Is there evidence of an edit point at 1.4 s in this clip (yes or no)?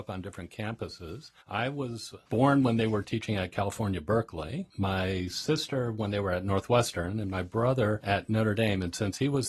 yes